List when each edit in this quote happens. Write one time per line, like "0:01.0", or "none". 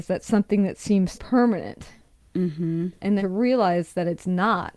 0:01.1
0:03.2